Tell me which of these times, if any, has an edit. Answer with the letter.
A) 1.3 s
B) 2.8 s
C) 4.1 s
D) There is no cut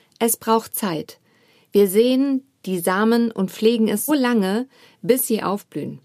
C